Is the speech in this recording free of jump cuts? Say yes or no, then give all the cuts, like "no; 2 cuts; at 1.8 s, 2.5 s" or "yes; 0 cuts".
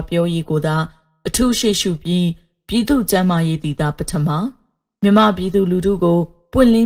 yes; 0 cuts